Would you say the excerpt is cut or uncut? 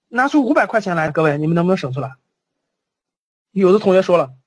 cut